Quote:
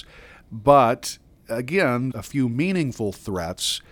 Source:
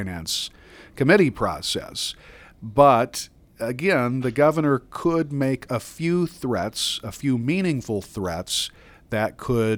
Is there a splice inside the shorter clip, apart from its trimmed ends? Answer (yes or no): yes